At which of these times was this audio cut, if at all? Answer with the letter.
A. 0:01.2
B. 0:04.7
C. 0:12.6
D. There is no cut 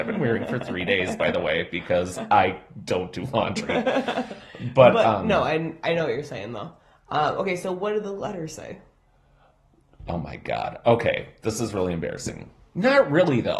D